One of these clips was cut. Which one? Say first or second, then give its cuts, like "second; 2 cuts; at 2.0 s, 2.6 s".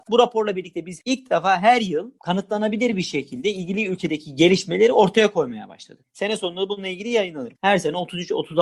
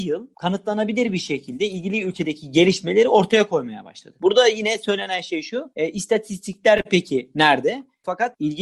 first; 2 cuts; at 6.0 s, 7.5 s